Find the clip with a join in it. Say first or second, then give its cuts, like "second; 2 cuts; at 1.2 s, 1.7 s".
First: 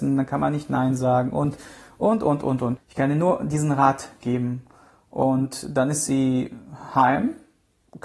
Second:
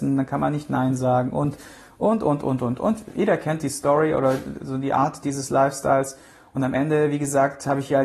first; 1 cut; at 2.8 s